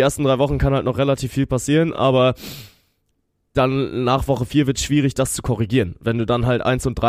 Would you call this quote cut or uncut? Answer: uncut